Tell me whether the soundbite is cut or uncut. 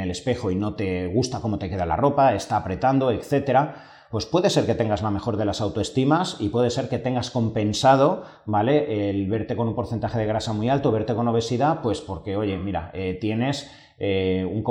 uncut